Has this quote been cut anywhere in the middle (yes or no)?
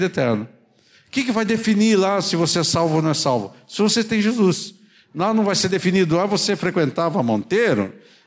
no